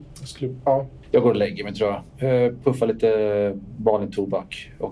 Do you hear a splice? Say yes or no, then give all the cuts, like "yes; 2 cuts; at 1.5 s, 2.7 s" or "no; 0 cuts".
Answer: yes; 1 cut; at 1.0 s